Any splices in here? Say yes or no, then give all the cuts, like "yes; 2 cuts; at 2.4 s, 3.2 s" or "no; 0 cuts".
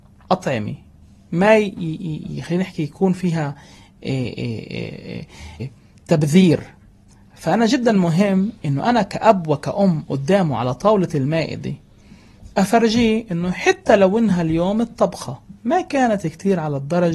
yes; 2 cuts; at 5.6 s, 15.6 s